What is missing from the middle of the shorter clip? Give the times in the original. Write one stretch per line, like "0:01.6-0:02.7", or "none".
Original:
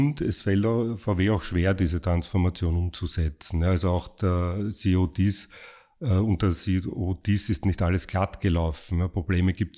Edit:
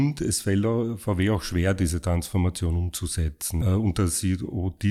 0:03.6-0:06.1